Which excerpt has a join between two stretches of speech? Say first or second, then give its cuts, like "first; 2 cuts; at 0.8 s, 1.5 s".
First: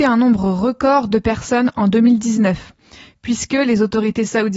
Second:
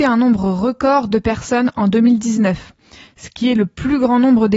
second; 1 cut; at 3.1 s